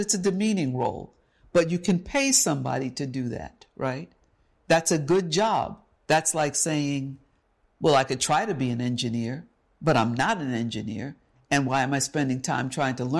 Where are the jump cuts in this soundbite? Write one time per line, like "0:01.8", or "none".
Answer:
0:06.0